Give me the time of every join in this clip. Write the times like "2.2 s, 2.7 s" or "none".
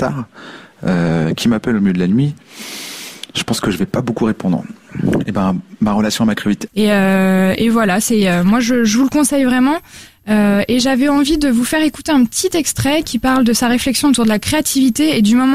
6.7 s